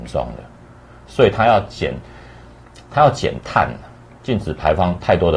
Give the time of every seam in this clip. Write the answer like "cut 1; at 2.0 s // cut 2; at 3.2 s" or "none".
none